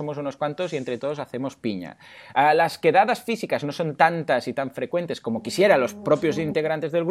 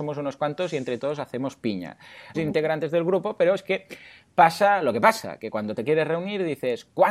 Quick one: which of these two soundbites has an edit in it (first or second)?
second